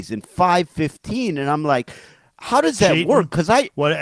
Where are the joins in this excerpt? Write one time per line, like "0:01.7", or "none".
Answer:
none